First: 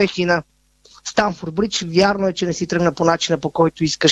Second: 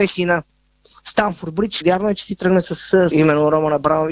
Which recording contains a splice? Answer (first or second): second